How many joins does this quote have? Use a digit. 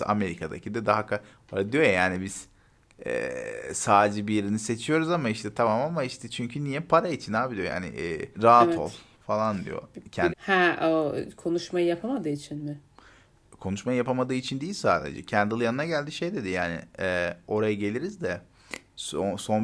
2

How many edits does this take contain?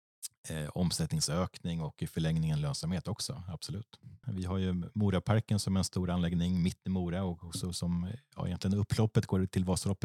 1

